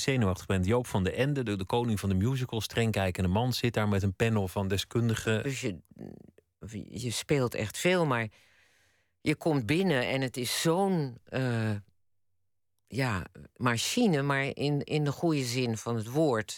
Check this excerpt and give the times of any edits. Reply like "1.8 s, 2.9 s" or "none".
5.4 s, 13.5 s